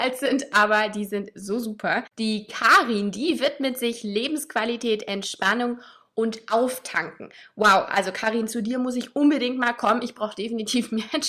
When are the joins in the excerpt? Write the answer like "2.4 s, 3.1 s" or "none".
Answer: none